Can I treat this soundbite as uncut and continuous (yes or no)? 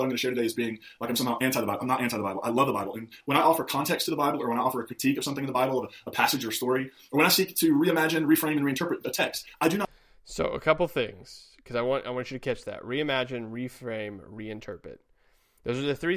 yes